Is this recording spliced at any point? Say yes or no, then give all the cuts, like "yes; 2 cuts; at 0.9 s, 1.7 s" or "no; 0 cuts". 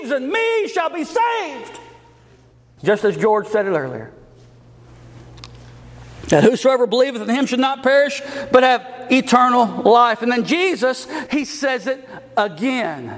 yes; 2 cuts; at 2.8 s, 11.3 s